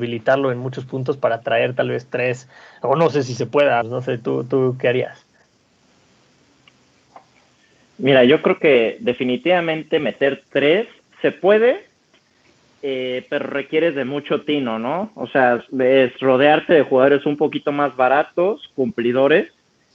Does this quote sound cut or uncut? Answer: cut